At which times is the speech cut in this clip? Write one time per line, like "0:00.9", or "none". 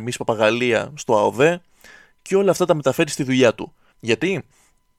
0:03.9